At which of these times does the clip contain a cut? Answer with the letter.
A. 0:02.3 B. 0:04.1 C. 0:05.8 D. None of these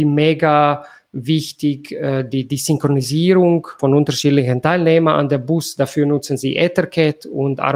D